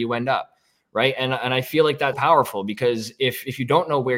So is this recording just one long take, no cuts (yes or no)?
no